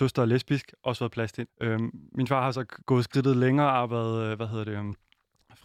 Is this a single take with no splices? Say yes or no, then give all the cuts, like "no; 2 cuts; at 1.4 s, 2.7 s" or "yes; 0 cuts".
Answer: no; 2 cuts; at 1.5 s, 2.8 s